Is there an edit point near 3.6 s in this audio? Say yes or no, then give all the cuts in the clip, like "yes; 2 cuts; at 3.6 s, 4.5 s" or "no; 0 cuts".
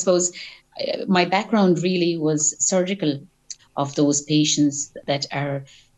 yes; 1 cut; at 3.6 s